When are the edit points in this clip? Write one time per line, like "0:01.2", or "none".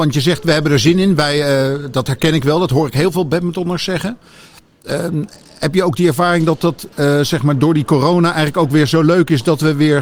0:06.9